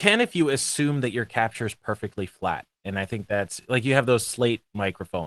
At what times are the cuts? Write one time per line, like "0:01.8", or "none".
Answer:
none